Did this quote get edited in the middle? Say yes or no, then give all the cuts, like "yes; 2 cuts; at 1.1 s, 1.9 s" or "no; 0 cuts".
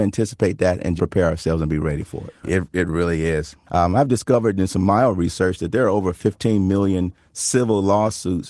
yes; 2 cuts; at 1.0 s, 2.4 s